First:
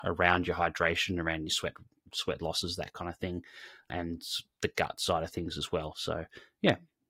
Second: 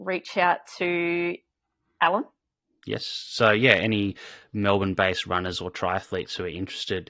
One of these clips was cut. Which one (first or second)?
first